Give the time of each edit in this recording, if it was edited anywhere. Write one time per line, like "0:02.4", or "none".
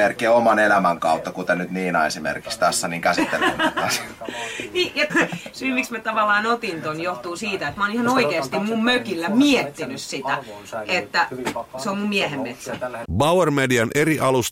0:05.1
0:13.0